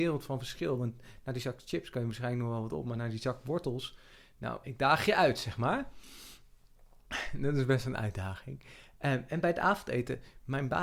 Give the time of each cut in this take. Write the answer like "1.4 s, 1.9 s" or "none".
4.6 s